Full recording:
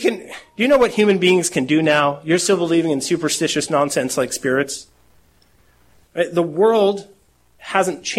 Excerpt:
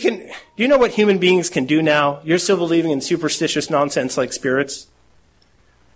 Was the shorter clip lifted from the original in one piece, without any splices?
yes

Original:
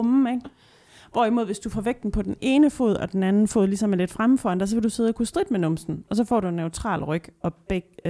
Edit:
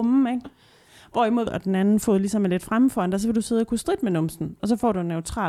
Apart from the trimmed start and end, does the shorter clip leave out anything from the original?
yes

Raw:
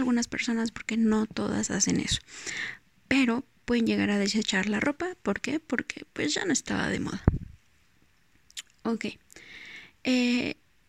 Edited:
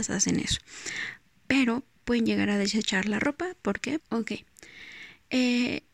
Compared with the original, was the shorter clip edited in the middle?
yes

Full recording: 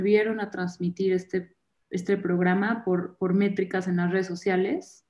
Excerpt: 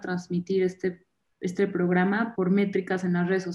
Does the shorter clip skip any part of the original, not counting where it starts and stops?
yes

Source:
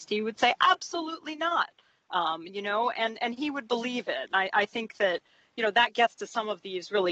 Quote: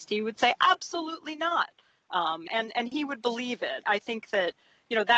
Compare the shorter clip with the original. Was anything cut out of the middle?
yes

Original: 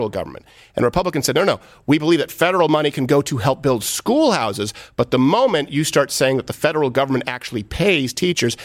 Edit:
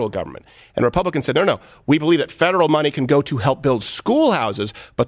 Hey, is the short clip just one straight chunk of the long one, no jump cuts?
yes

